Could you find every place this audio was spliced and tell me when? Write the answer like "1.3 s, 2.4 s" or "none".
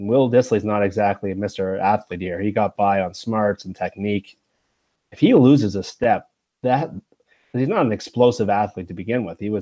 none

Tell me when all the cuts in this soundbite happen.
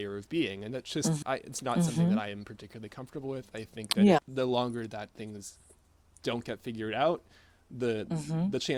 1.2 s, 4.2 s

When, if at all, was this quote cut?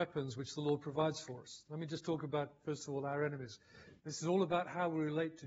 4.0 s

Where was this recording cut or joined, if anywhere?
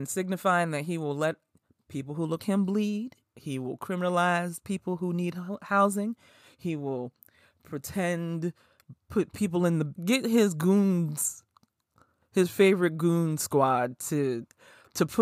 2.4 s, 9.9 s

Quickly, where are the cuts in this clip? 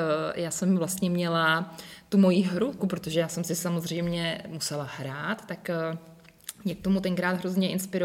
2.8 s

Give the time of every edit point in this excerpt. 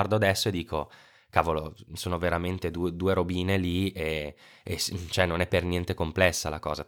none

